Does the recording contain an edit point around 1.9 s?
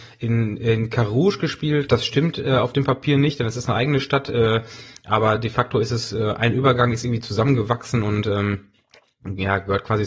yes; 1 cut; at 1.9 s

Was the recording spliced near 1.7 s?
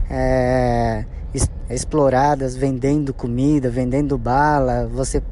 yes; 1 cut; at 1.7 s

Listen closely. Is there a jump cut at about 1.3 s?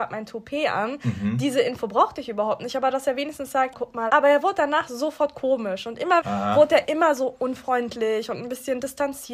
no; 2 cuts; at 3.7 s, 6.2 s

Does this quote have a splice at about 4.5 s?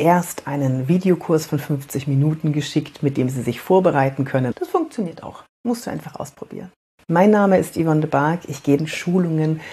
yes; 1 cut; at 4.5 s

